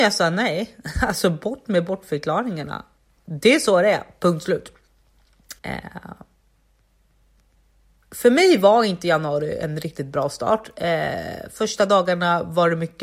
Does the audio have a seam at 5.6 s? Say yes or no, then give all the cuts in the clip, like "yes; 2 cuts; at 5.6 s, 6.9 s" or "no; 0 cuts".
yes; 1 cut; at 5.6 s